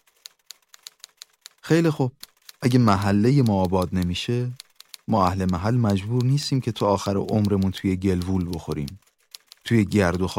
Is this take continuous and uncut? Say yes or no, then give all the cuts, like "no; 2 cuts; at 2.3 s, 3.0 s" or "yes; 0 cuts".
yes; 0 cuts